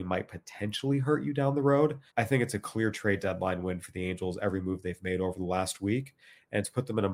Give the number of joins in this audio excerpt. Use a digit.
1